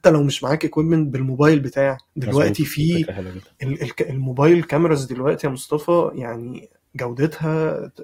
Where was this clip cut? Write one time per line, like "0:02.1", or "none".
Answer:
0:02.1